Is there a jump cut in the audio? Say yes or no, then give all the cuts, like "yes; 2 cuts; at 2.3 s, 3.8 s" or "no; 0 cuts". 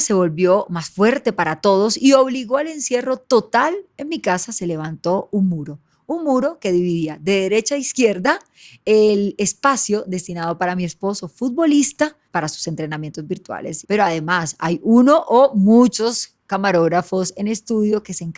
yes; 2 cuts; at 12.2 s, 13.8 s